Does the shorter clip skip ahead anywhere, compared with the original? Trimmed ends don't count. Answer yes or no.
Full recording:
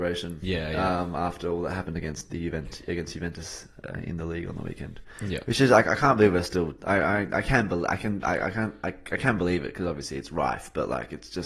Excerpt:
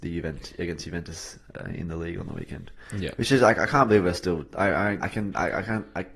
yes